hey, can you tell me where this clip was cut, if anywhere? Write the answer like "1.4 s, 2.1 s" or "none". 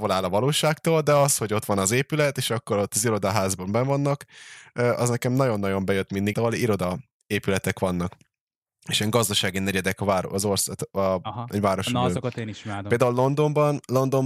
6.3 s